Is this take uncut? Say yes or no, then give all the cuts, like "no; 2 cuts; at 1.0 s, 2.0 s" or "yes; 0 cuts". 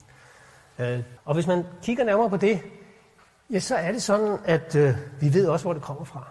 no; 1 cut; at 1.2 s